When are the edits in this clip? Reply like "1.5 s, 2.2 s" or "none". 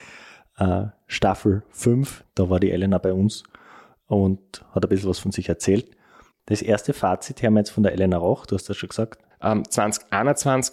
2.2 s, 6.3 s, 9.3 s